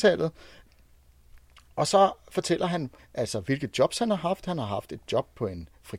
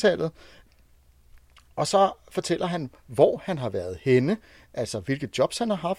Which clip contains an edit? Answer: first; 1 cut; at 3.0 s

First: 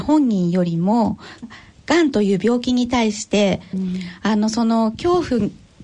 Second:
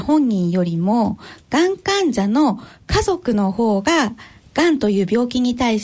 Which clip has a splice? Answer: first; 2 cuts; at 1.4 s, 3.7 s

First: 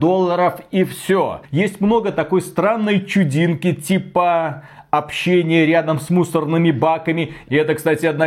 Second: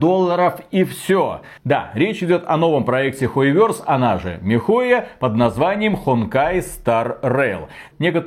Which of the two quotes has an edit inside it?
first; 1 cut; at 1.5 s

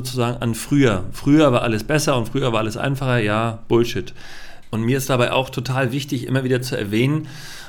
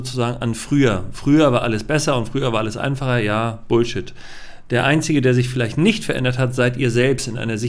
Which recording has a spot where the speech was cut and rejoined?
first; 1 cut; at 4.6 s

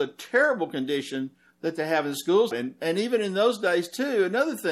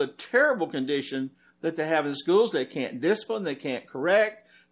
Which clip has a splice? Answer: first; 1 cut; at 2.5 s

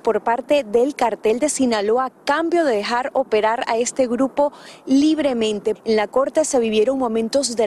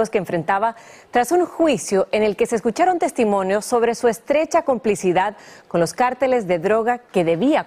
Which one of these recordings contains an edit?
first; 1 cut; at 5.8 s

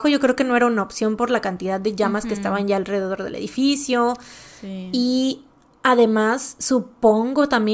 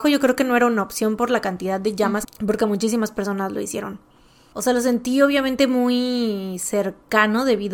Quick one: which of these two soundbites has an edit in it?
second; 2 cuts; at 2.2 s, 4.5 s

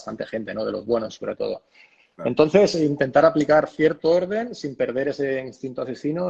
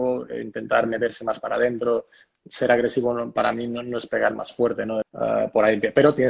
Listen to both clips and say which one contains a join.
second; 1 cut; at 5.0 s

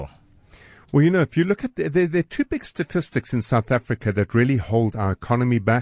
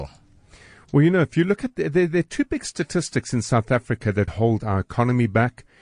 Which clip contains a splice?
second; 1 cut; at 4.3 s

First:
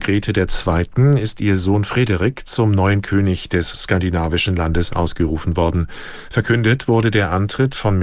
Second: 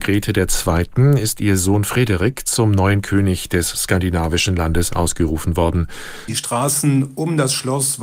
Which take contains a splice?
second; 1 cut; at 6.3 s

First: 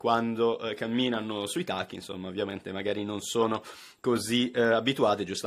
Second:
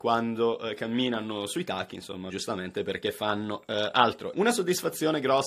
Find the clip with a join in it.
second; 2 cuts; at 2.3 s, 4.3 s

